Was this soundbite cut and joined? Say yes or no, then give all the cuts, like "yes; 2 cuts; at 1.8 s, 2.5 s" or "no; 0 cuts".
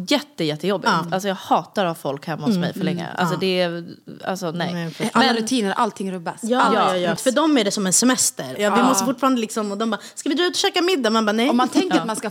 yes; 2 cuts; at 7.2 s, 8.6 s